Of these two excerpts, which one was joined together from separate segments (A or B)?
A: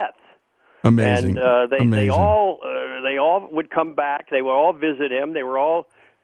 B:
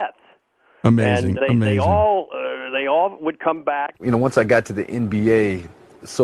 B